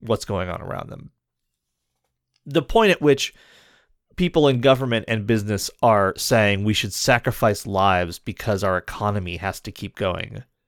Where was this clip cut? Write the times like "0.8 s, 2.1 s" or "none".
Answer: none